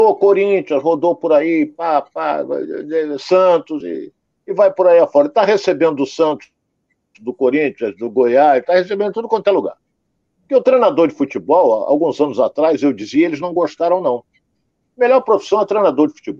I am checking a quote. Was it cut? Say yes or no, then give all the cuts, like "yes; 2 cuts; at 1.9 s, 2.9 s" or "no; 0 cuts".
no; 0 cuts